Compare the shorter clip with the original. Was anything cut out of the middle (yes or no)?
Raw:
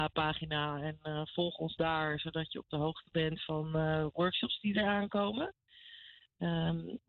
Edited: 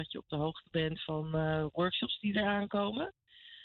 no